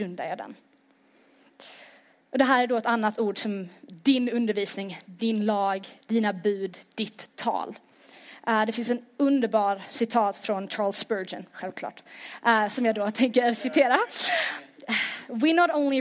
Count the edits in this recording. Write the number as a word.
zero